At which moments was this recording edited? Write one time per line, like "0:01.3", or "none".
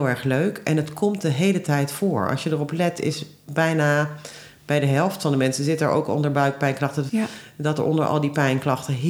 0:07.1